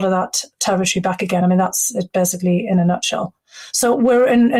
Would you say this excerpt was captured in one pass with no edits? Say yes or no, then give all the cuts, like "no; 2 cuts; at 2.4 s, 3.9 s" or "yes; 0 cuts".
yes; 0 cuts